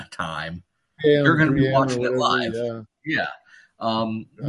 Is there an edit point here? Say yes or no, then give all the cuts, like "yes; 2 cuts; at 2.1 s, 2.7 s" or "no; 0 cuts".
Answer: yes; 1 cut; at 1.0 s